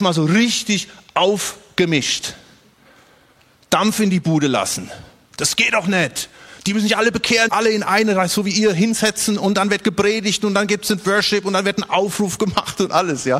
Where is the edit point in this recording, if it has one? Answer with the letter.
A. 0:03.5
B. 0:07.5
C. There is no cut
B